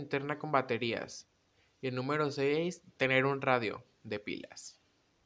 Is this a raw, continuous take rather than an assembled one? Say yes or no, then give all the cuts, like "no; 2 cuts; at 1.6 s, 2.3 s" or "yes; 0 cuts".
yes; 0 cuts